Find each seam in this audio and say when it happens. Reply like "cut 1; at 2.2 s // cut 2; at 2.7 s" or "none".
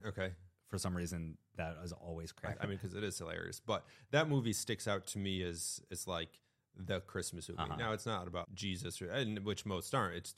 cut 1; at 2.5 s // cut 2; at 8.4 s